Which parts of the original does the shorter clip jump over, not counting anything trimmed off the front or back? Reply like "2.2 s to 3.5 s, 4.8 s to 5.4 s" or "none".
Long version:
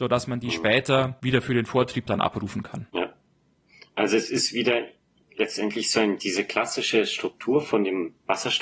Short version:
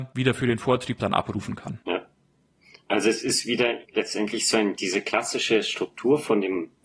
4.9 s to 5.3 s